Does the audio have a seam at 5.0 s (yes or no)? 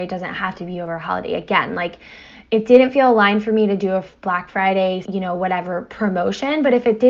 yes